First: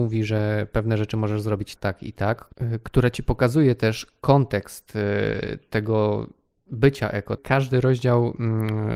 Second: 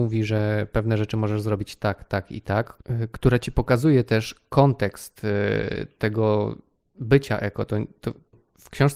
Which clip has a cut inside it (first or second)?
first